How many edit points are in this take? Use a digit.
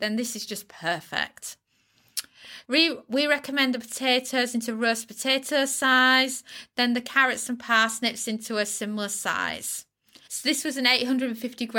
2